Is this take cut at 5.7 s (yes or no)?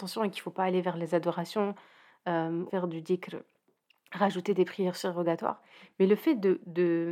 no